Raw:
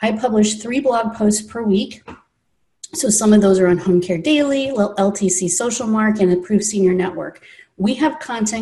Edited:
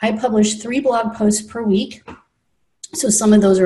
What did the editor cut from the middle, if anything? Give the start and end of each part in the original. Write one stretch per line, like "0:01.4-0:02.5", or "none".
none